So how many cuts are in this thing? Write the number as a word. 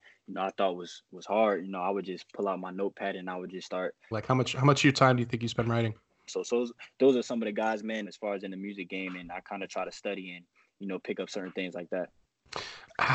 three